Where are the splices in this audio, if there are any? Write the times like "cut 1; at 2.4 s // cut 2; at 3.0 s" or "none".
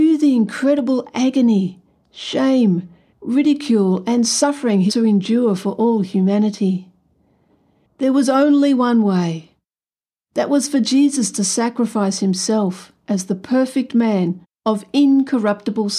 cut 1; at 3.1 s // cut 2; at 7.9 s

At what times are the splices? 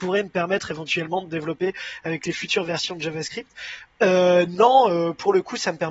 cut 1; at 3.9 s

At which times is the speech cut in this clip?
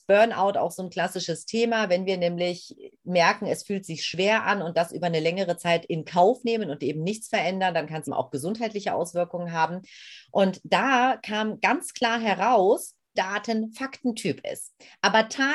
cut 1; at 8.1 s // cut 2; at 13.1 s

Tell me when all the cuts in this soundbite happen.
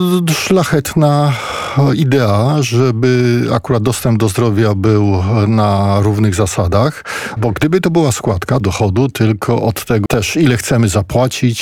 cut 1; at 7.4 s // cut 2; at 8.6 s // cut 3; at 10.1 s

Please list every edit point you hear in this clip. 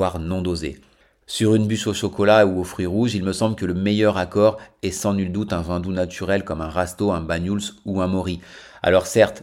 cut 1; at 1.2 s

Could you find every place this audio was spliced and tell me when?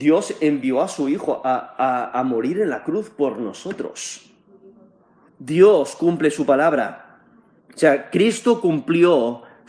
cut 1; at 5.3 s // cut 2; at 7.6 s

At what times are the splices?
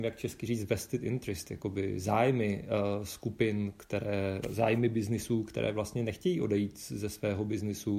cut 1; at 4.4 s

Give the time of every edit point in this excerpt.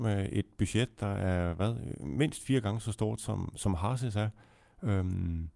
none

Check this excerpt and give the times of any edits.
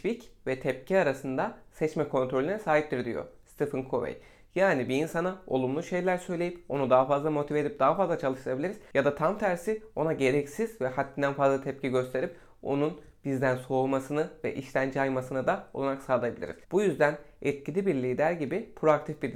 cut 1; at 16.6 s

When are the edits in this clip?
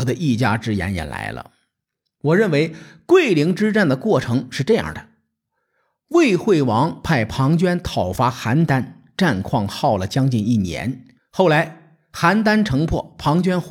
cut 1; at 11.2 s

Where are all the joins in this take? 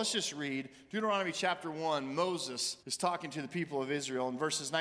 cut 1; at 2.8 s

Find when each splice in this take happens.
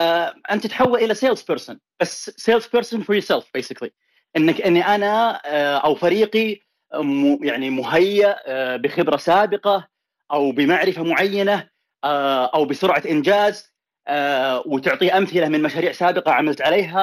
none

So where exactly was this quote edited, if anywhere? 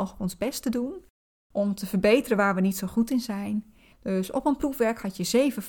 cut 1; at 3.9 s

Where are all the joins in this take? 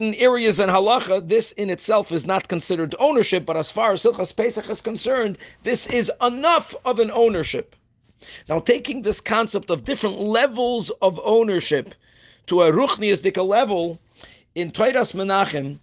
none

